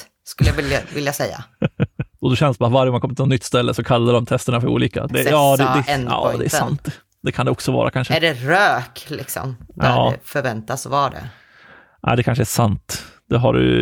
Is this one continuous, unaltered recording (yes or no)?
no